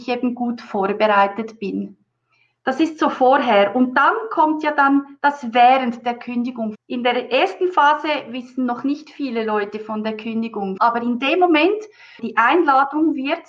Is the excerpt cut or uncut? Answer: cut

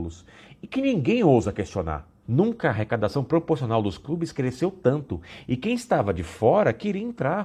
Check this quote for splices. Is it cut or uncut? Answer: cut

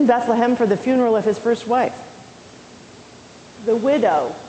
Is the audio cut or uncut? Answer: cut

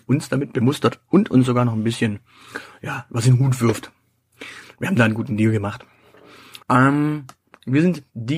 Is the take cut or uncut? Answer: cut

